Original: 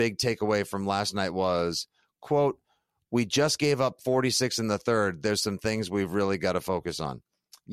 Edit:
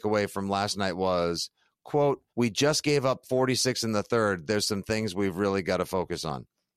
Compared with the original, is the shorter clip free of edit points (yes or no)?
no